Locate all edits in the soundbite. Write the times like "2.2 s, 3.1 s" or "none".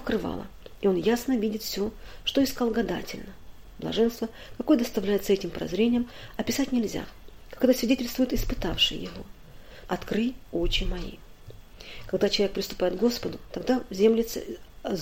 9.9 s

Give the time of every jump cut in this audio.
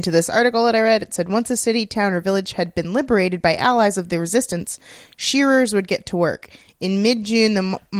none

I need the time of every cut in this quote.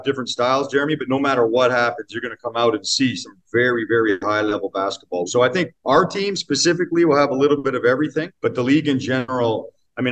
5.3 s, 8.3 s

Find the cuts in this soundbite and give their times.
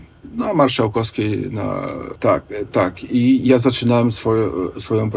2.2 s

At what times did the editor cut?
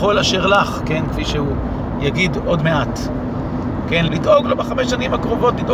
4.1 s

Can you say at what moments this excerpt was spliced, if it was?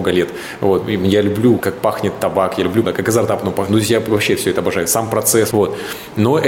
1.6 s, 2.8 s, 5.5 s

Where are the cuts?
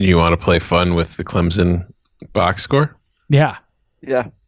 none

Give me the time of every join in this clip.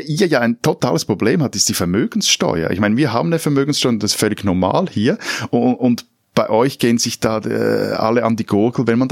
none

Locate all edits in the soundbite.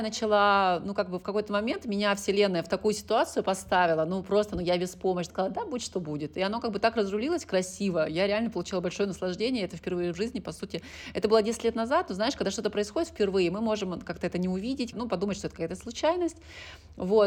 5.3 s, 14.9 s

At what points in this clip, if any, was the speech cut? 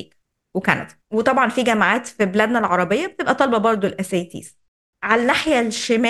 1.0 s

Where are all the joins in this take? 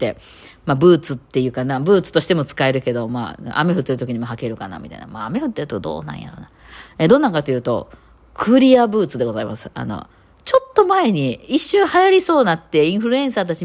none

